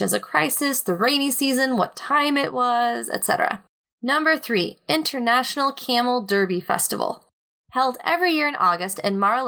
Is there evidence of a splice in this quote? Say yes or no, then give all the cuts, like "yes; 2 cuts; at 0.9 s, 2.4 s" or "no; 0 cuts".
yes; 1 cut; at 3.8 s